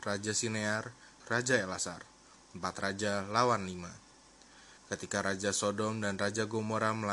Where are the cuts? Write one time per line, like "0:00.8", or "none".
0:01.2
0:04.8